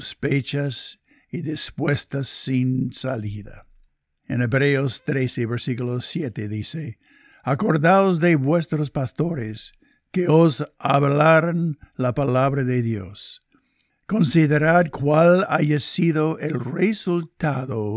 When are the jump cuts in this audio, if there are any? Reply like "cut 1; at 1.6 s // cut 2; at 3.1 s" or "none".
none